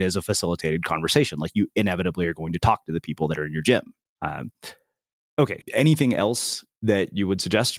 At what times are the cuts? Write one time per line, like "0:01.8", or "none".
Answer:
0:04.1
0:05.6